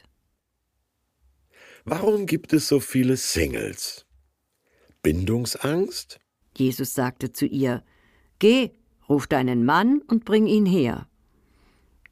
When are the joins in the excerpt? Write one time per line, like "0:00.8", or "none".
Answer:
0:06.4